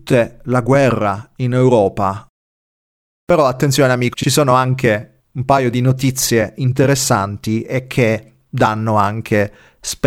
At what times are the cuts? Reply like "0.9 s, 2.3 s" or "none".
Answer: 4.1 s, 5.2 s